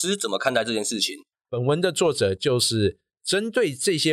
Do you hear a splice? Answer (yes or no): yes